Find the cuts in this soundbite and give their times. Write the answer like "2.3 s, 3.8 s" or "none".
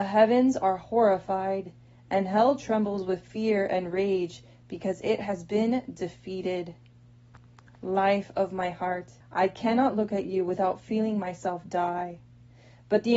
9.2 s